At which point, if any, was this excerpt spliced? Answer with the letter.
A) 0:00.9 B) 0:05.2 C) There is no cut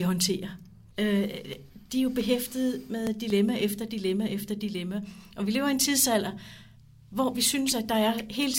A